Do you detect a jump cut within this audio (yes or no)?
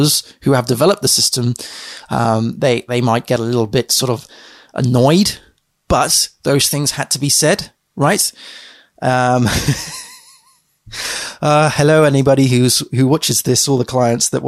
no